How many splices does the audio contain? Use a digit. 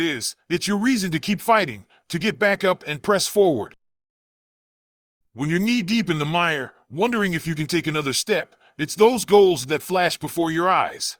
0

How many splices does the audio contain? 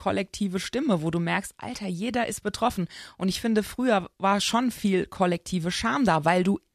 0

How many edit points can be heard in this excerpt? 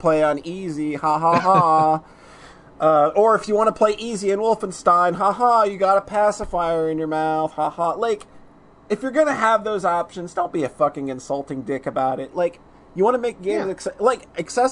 1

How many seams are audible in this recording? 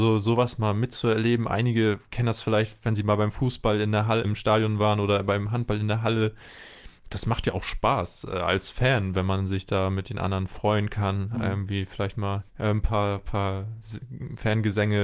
2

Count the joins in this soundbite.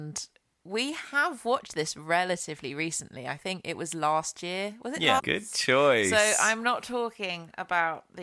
1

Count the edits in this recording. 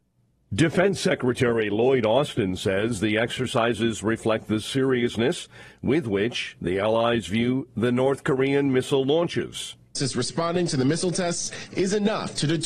1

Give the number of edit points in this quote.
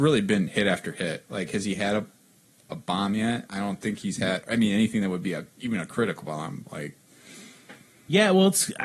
0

